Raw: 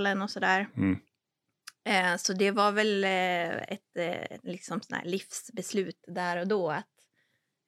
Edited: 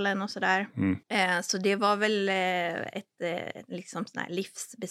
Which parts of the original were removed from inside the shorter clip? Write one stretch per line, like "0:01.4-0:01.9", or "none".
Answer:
0:01.0-0:01.8